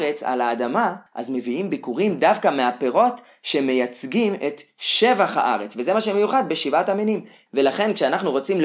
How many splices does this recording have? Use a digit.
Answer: 2